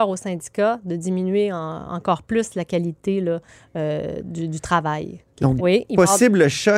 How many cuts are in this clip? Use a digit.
1